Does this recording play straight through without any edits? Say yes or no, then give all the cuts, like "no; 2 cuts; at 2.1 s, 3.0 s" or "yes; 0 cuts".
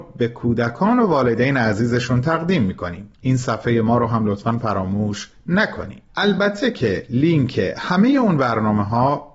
no; 2 cuts; at 3.1 s, 6.1 s